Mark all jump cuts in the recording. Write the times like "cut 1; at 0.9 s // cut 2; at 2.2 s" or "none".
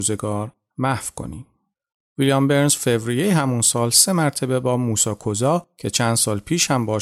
cut 1; at 2.0 s

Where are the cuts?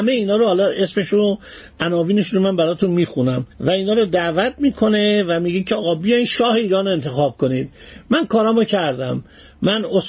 cut 1; at 3.5 s

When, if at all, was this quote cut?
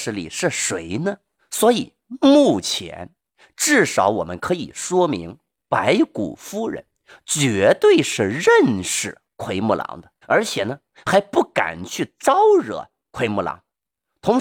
cut 1; at 1.4 s // cut 2; at 10.2 s

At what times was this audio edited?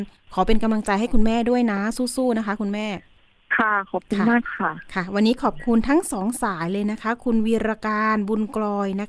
none

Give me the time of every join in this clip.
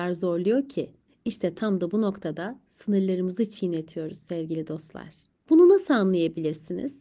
none

